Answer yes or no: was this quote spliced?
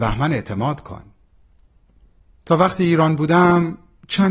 no